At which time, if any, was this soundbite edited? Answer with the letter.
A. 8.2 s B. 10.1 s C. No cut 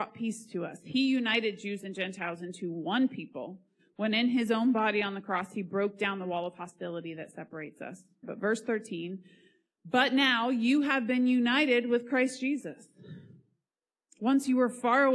A